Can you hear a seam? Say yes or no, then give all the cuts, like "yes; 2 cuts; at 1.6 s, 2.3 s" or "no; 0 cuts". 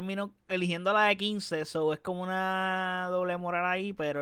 no; 0 cuts